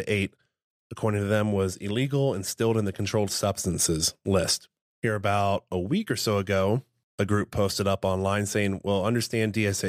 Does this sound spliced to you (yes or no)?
no